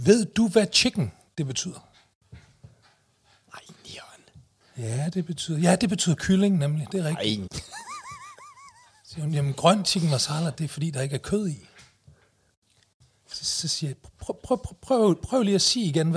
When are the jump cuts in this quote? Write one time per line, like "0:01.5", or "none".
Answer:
0:07.5